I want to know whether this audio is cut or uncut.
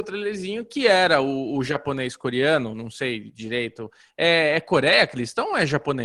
uncut